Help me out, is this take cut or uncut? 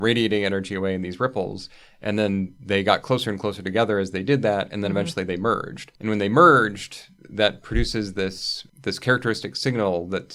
uncut